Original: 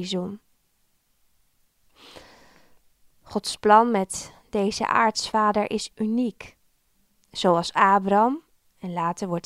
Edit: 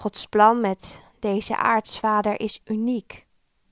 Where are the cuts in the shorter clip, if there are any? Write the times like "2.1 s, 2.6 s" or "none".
none